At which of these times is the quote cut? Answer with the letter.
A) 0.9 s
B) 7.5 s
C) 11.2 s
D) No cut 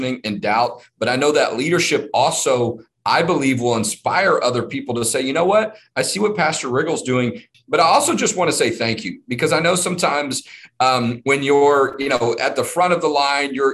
B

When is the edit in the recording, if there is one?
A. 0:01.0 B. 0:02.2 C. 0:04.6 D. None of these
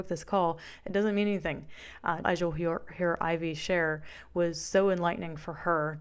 B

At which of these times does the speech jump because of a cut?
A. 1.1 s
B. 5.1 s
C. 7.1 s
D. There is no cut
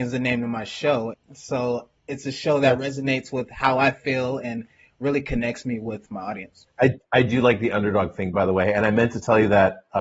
A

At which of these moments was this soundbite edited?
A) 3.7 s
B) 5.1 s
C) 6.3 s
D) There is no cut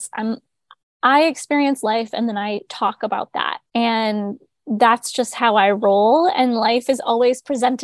A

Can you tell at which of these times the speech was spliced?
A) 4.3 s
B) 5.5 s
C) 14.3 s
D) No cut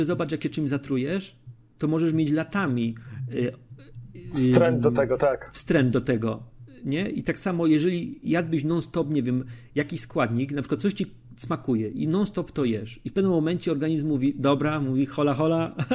D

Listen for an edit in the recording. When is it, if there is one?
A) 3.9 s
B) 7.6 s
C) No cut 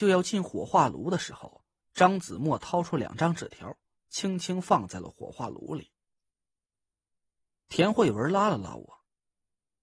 B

